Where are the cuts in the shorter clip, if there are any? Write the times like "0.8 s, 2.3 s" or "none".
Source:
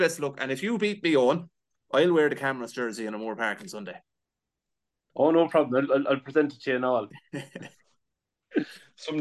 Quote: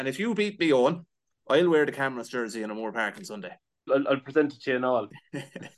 3.9 s